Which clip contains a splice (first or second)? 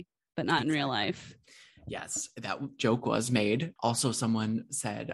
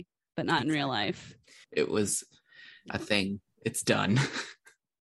second